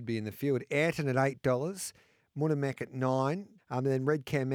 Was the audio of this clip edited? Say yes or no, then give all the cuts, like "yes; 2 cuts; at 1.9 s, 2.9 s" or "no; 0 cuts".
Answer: yes; 1 cut; at 3.6 s